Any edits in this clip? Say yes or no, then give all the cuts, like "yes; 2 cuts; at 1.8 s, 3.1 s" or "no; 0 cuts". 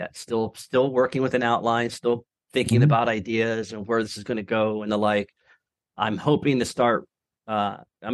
no; 0 cuts